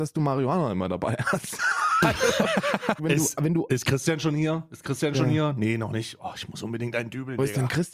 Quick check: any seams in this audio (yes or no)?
yes